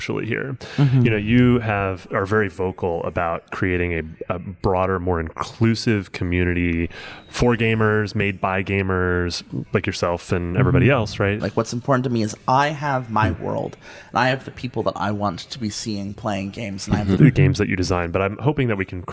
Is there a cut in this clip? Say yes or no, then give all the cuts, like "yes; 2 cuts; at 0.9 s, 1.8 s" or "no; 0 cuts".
yes; 2 cuts; at 11.4 s, 17.2 s